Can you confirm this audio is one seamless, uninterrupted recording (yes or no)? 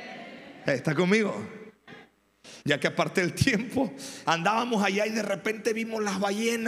no